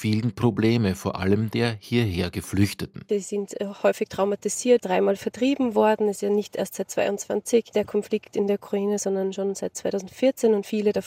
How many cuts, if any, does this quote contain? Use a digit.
1